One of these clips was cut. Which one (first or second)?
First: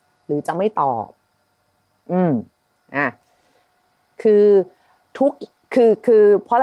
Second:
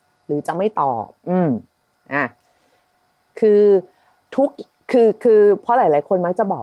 second